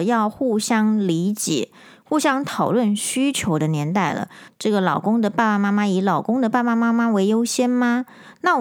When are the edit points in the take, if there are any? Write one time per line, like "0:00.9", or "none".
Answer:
0:04.5